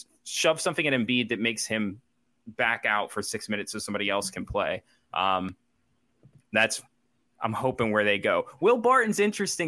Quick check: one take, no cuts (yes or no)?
yes